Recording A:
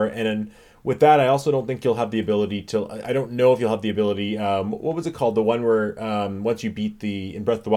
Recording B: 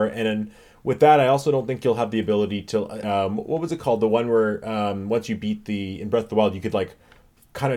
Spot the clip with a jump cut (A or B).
B